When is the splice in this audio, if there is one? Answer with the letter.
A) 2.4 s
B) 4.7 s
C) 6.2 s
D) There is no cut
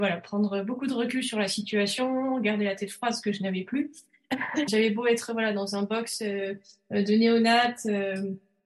B